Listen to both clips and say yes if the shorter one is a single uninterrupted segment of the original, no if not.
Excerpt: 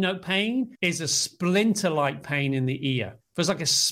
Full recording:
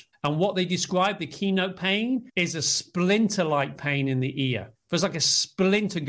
yes